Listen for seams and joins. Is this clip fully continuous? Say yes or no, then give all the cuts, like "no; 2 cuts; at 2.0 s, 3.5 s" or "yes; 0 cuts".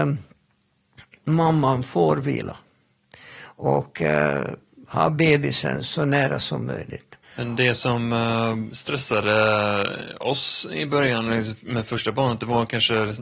no; 1 cut; at 7.2 s